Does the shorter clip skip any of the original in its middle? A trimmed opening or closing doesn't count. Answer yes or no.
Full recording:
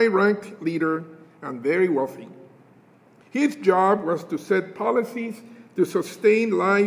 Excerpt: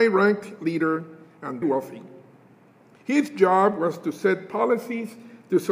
yes